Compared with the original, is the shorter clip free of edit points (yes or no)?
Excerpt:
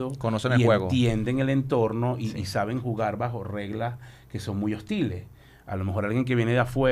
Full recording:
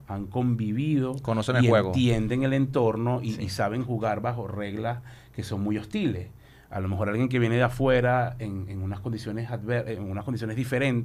yes